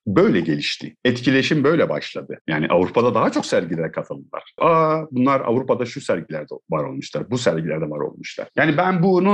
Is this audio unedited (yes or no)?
no